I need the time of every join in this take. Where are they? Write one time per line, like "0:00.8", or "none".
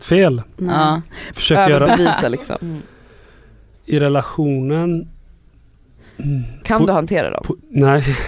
0:01.3
0:02.6
0:06.6